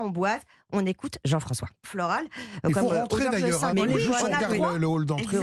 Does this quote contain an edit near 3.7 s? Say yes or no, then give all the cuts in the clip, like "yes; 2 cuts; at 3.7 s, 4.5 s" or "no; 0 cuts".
yes; 2 cuts; at 1.8 s, 3.7 s